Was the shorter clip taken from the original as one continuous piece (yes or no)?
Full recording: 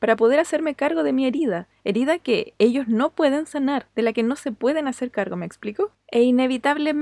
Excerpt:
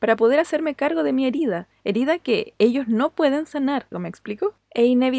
no